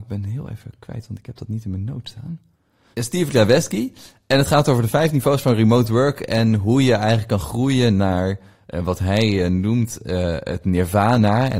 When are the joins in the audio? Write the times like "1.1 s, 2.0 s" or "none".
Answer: 2.9 s